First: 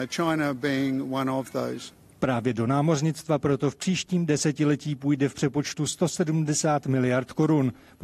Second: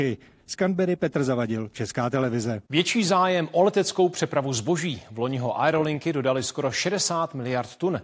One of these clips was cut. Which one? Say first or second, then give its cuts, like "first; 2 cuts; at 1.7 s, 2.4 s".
second; 1 cut; at 2.7 s